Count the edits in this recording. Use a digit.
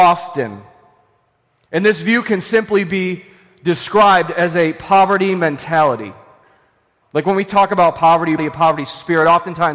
2